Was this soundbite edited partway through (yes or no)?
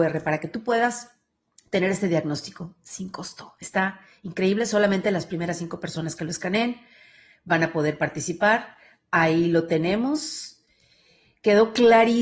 no